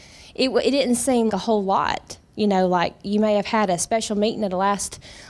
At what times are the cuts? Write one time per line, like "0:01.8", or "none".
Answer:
0:01.3